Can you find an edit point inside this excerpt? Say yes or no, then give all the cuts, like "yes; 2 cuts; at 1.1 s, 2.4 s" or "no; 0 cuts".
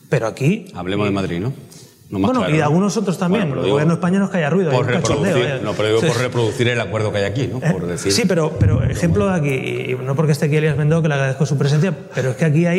no; 0 cuts